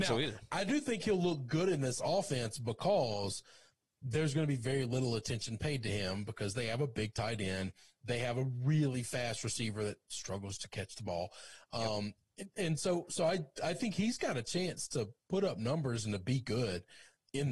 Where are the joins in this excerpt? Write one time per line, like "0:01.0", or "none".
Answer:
none

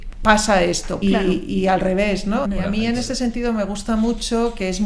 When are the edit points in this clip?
0:01.0
0:02.4

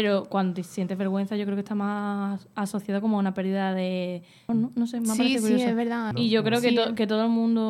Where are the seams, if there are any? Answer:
0:04.5
0:06.1

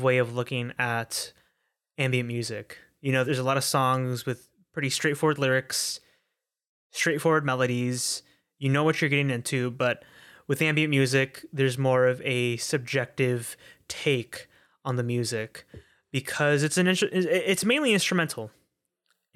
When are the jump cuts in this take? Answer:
0:03.2

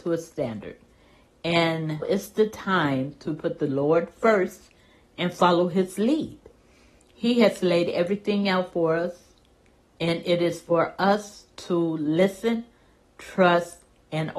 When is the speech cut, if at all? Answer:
0:02.0

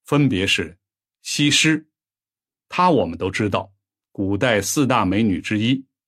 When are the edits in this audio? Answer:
none

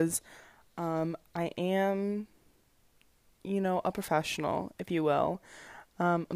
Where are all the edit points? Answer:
none

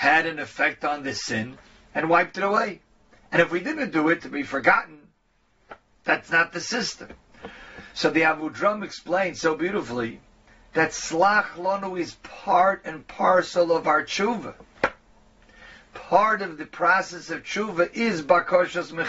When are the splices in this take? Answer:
0:04.2

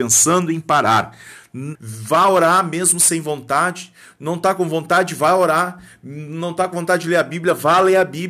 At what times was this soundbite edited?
0:01.7

